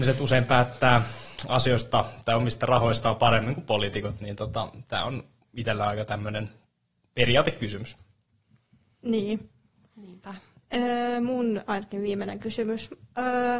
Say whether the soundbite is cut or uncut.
uncut